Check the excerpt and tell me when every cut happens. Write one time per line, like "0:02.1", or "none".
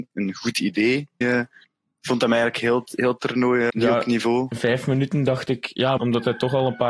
0:01.2
0:03.7
0:06.0